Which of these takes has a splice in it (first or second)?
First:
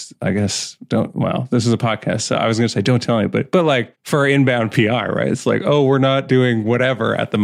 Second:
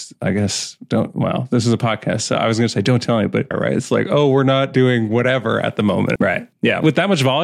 second